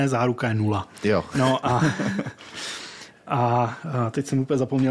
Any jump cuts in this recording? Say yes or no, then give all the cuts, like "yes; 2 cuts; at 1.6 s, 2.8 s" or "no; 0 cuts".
no; 0 cuts